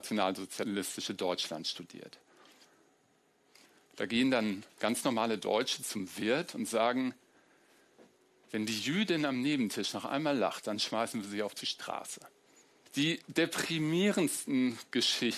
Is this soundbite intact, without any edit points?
no; 1 cut; at 12.9 s

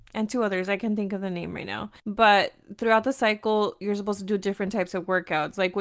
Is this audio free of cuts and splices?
no; 1 cut; at 2.0 s

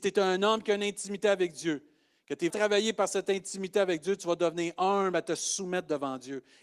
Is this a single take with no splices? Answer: no; 1 cut; at 2.5 s

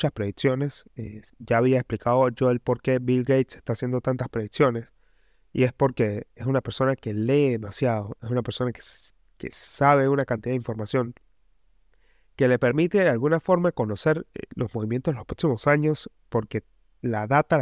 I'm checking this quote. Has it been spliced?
no; 0 cuts

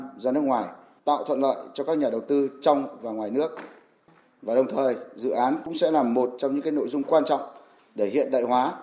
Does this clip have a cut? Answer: yes; 1 cut; at 1.0 s

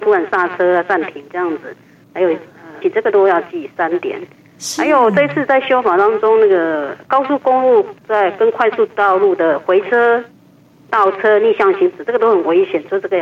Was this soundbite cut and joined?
yes; 1 cut; at 2.8 s

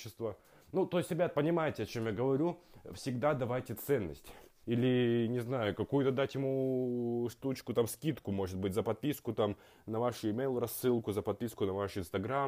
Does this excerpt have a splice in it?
yes; 1 cut; at 4.6 s

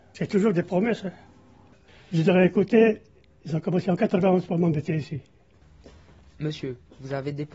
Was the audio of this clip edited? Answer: no; 0 cuts

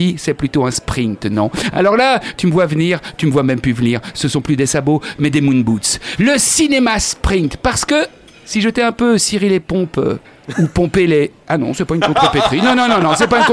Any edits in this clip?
no; 0 cuts

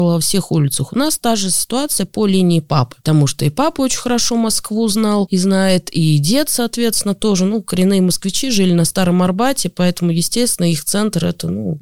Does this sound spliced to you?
no; 0 cuts

